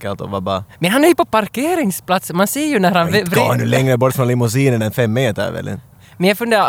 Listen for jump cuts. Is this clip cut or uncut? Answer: uncut